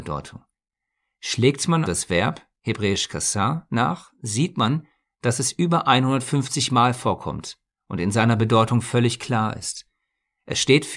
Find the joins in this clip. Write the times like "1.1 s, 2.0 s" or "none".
1.9 s